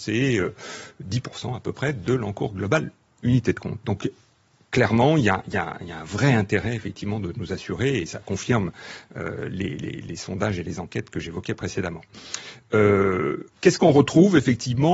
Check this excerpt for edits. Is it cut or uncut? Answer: uncut